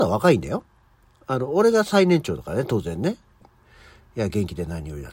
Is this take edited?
yes; 1 cut; at 3.4 s

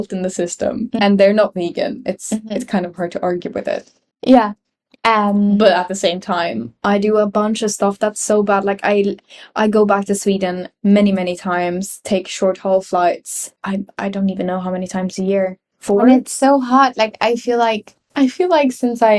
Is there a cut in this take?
yes; 1 cut; at 1.0 s

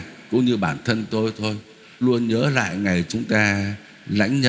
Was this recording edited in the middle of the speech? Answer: yes; 1 cut; at 2.0 s

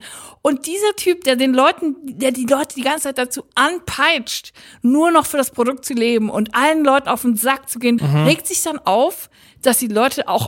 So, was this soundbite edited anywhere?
yes; 1 cut; at 8.0 s

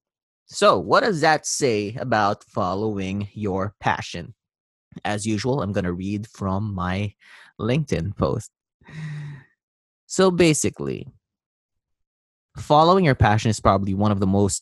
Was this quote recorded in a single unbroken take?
yes; 0 cuts

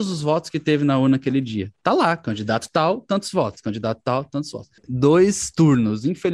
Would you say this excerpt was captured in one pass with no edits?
no; 1 cut; at 4.8 s

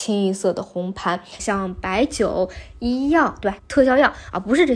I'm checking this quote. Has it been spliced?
yes; 2 cuts; at 1.4 s, 3.6 s

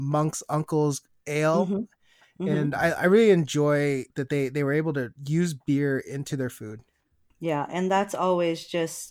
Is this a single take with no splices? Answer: yes; 0 cuts

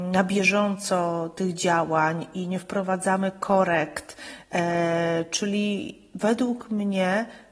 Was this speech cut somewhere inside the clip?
no; 0 cuts

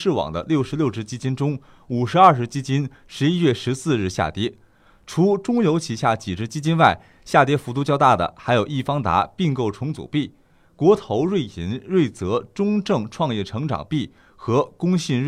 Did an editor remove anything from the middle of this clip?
no; 0 cuts

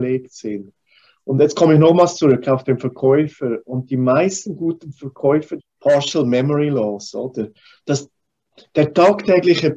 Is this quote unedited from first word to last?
no; 2 cuts; at 5.6 s, 7.8 s

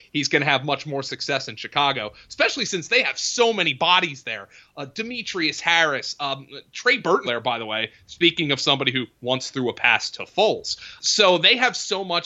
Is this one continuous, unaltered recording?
no; 2 cuts; at 7.2 s, 11.0 s

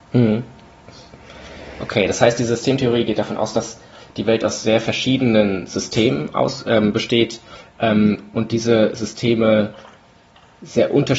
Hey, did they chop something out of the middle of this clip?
no; 0 cuts

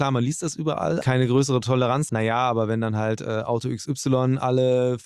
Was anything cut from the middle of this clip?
yes; 2 cuts; at 1.0 s, 2.1 s

